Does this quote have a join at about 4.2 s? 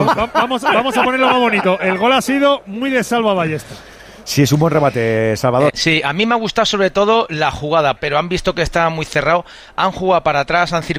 no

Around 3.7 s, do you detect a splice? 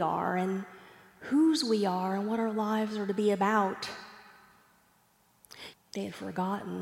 no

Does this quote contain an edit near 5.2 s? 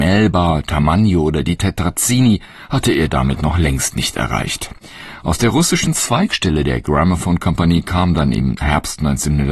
no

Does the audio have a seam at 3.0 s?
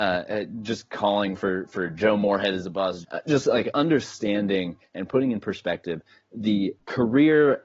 yes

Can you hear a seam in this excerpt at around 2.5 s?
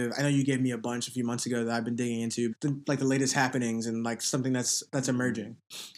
yes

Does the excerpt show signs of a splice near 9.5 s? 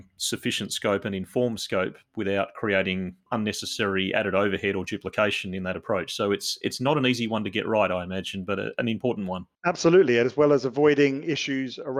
yes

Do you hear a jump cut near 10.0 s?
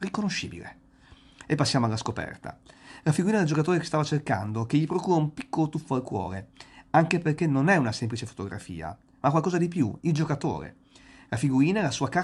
yes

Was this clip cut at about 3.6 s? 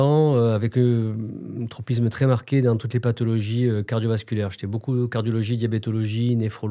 no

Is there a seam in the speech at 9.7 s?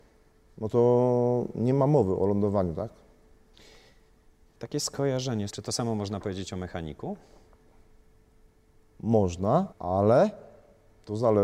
yes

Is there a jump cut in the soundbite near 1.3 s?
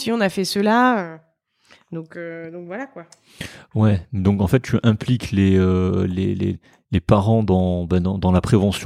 no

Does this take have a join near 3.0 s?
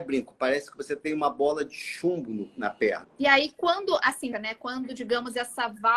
yes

